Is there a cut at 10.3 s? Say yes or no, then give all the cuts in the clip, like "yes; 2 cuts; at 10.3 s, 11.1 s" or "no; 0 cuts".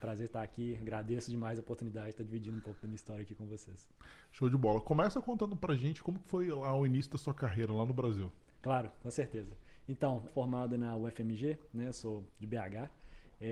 yes; 1 cut; at 10.3 s